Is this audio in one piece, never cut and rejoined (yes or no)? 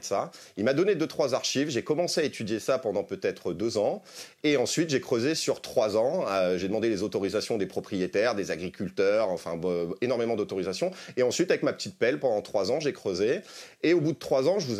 yes